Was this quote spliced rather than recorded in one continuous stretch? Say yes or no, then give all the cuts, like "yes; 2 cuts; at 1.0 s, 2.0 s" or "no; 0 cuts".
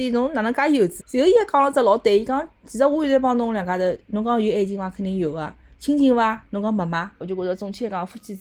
yes; 2 cuts; at 1.0 s, 7.2 s